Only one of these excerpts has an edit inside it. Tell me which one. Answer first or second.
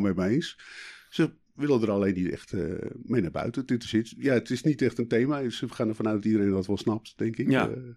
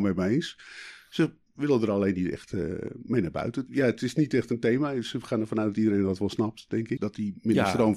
second